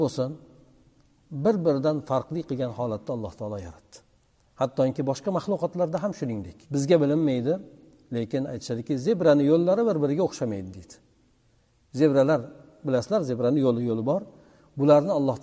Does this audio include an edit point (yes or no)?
yes